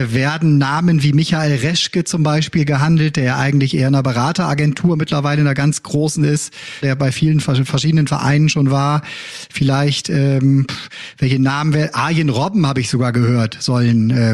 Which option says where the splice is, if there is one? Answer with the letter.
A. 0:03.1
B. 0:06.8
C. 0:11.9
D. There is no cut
B